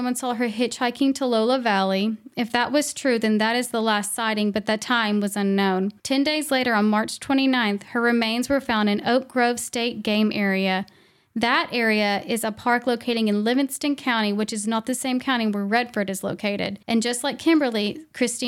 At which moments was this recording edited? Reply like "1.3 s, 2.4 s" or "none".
6.0 s, 16.8 s

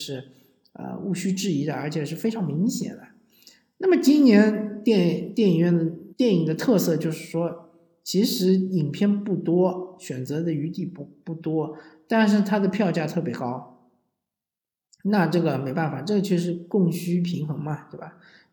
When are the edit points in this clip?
6.1 s

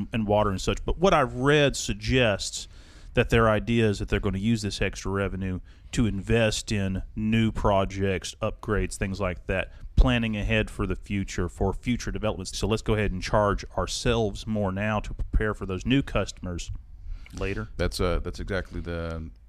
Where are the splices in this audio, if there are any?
12.5 s

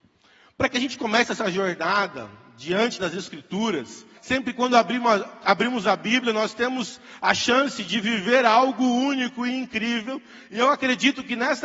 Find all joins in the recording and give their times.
4.2 s

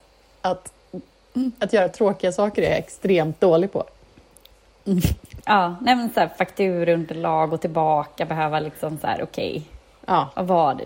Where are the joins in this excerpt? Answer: 5.4 s

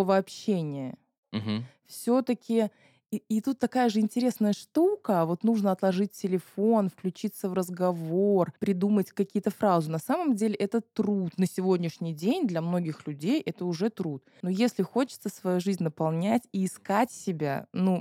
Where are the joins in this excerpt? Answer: none

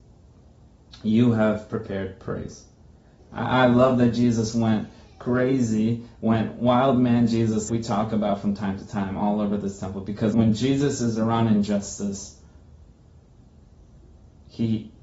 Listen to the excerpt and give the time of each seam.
3.2 s, 7.7 s, 10.3 s

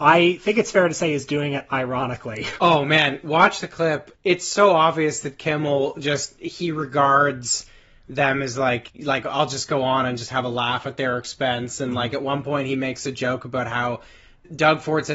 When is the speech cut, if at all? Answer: none

